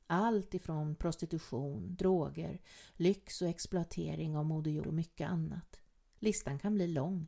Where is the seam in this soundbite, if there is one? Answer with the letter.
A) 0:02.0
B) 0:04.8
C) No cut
B